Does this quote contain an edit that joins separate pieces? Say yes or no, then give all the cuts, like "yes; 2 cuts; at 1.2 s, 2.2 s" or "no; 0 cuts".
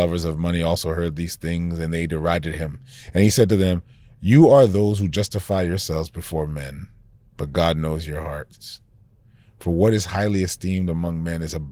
no; 0 cuts